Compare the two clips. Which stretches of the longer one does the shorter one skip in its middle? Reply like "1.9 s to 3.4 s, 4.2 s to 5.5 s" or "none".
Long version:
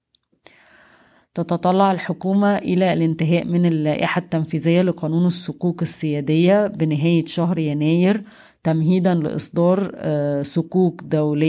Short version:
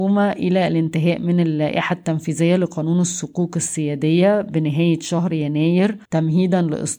8.3 s to 8.6 s